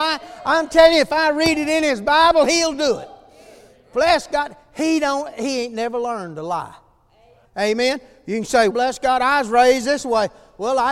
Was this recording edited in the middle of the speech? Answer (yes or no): yes